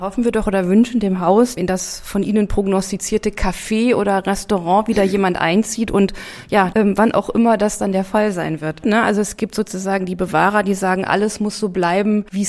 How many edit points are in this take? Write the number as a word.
three